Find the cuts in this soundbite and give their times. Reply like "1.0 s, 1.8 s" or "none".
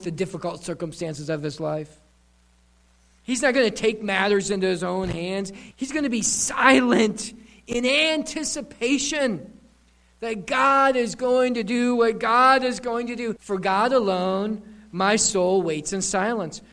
5.7 s, 13.4 s